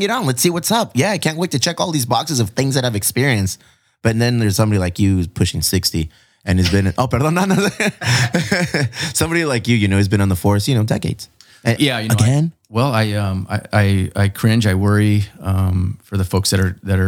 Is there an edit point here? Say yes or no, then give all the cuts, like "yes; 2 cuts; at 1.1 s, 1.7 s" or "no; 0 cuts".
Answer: yes; 1 cut; at 11.8 s